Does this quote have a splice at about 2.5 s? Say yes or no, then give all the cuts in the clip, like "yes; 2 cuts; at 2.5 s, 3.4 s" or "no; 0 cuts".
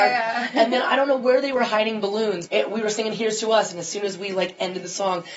yes; 1 cut; at 2.5 s